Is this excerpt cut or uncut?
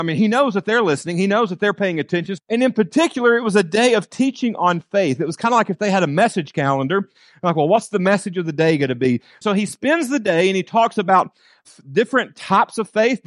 cut